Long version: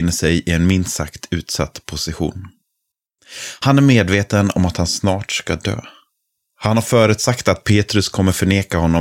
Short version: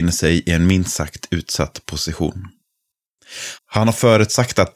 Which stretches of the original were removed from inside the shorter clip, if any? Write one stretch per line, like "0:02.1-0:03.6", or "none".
0:03.6-0:06.5